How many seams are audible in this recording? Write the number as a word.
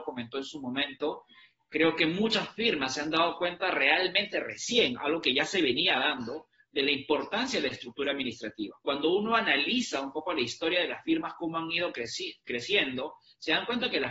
zero